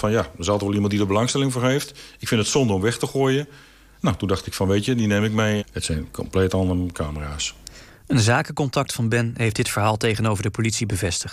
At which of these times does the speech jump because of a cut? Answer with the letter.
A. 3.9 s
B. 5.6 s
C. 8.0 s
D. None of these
B